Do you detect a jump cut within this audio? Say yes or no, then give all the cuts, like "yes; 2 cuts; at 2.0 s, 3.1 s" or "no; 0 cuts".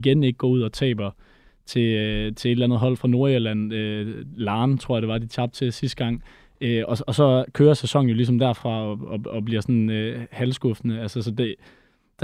no; 0 cuts